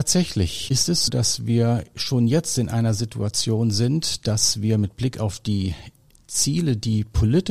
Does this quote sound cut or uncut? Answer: cut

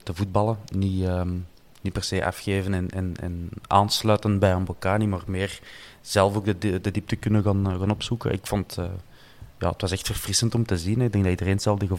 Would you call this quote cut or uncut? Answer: uncut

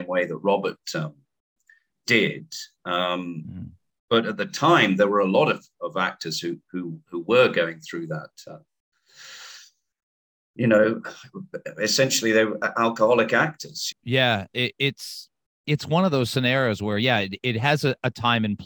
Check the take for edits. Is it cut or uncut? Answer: cut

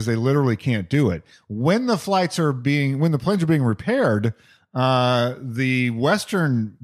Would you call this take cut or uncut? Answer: uncut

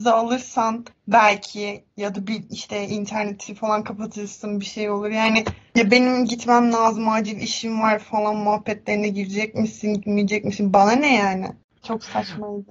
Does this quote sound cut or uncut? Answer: uncut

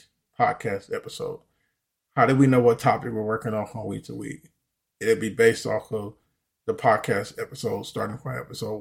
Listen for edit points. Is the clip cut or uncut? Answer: uncut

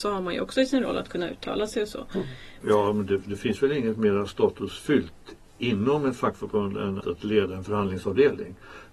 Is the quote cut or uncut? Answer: cut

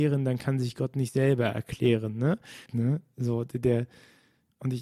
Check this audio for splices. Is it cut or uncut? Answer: cut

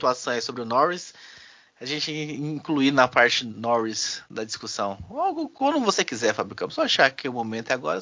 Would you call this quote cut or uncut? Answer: uncut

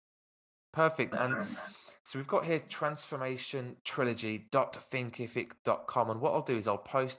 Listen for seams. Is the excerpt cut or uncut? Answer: cut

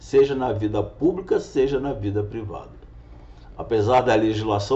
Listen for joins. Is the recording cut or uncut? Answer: uncut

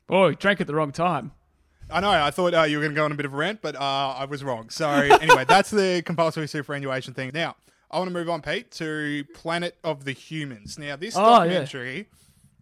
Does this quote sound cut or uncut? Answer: cut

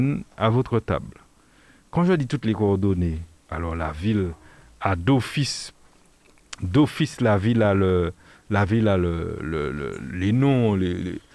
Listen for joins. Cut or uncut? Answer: uncut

